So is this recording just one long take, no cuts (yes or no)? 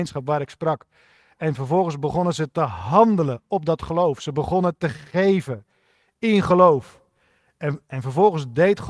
yes